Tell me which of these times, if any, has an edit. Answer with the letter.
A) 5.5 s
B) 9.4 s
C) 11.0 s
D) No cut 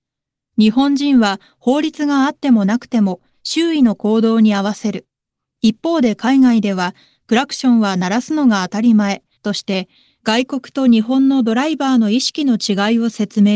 B